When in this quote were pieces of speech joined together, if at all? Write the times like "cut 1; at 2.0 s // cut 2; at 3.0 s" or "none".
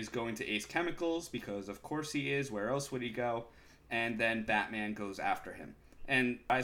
none